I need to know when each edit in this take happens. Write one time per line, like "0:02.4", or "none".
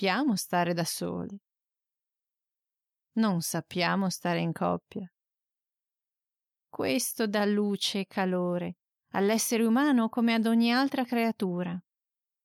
0:03.0
0:06.6